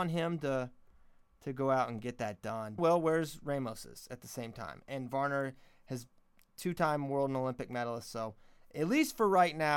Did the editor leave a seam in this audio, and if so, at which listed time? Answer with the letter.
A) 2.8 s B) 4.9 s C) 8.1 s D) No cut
A